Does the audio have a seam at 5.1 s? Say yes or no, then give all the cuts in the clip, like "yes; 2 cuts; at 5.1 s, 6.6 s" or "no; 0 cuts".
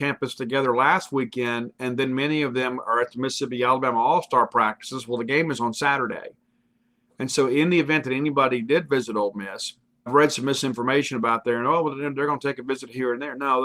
no; 1 cut; at 10.1 s